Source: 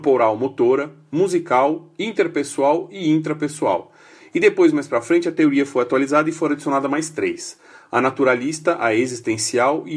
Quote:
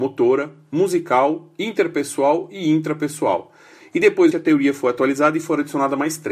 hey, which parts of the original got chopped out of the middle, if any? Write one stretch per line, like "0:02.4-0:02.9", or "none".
0:04.7-0:05.2